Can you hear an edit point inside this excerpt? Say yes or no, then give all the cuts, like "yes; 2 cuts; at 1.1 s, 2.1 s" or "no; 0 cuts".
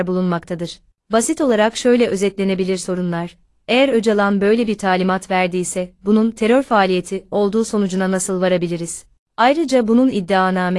yes; 1 cut; at 9.2 s